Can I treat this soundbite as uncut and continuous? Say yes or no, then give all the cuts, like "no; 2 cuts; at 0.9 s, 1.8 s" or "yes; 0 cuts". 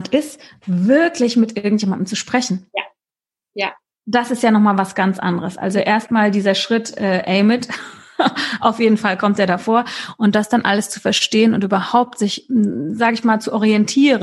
yes; 0 cuts